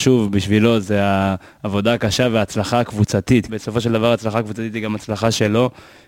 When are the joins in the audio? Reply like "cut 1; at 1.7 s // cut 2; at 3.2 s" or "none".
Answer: cut 1; at 3.5 s